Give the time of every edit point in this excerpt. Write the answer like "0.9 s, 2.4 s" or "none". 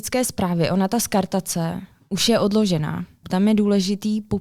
3.2 s

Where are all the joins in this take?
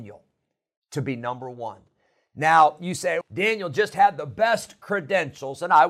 3.2 s

